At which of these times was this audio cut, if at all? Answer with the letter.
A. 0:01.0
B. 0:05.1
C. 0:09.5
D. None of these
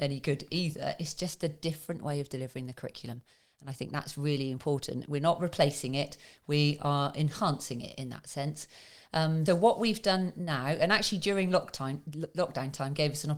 C